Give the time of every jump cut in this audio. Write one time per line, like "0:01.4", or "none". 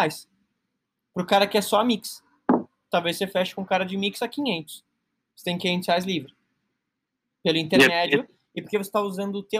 none